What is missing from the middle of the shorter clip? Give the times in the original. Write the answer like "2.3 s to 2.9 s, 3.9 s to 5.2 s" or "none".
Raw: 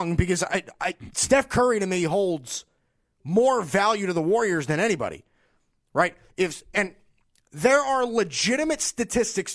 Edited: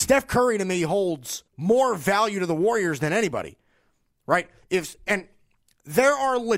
2.7 s to 3.1 s